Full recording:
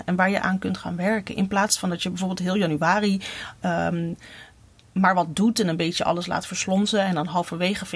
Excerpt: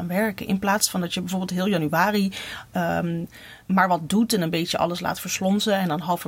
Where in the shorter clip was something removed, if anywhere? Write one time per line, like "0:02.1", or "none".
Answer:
0:03.6

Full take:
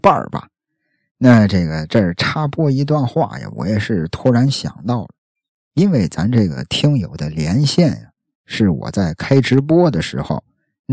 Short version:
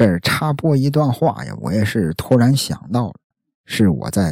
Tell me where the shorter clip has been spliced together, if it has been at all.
0:03.3

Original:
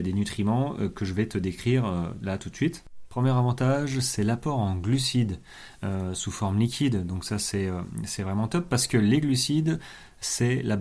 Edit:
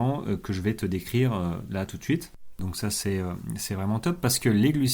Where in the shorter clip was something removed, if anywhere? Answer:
0:02.6

